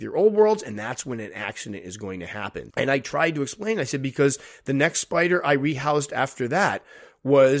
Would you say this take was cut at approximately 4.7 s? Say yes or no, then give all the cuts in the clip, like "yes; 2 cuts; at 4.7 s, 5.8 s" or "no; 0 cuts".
no; 1 cut; at 2.7 s